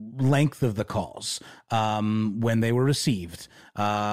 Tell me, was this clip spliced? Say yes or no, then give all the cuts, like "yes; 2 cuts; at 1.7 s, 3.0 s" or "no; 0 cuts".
no; 0 cuts